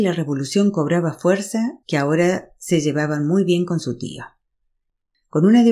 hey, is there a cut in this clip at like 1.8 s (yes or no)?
yes